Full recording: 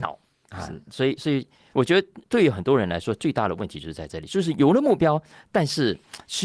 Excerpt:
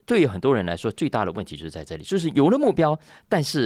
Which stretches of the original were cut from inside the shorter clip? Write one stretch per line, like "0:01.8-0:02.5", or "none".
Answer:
none